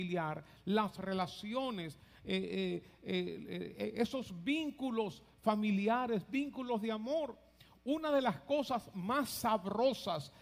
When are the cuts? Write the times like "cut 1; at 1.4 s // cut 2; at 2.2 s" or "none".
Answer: none